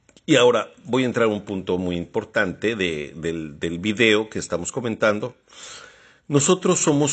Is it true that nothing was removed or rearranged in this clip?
yes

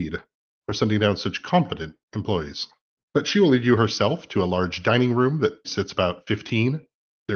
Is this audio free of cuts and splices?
no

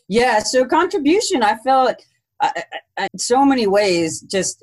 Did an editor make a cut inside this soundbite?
yes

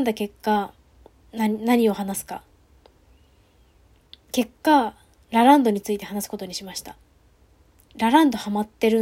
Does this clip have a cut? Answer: no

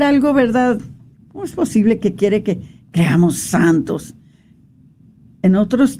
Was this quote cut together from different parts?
yes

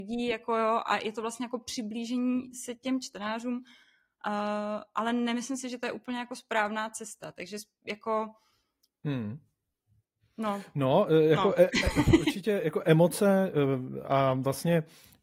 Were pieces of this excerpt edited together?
no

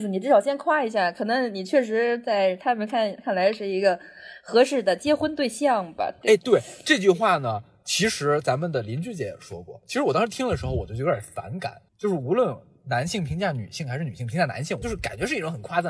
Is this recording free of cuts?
no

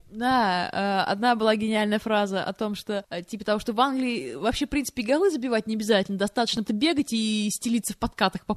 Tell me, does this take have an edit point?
yes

